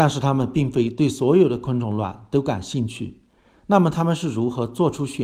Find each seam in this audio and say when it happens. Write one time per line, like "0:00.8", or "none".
none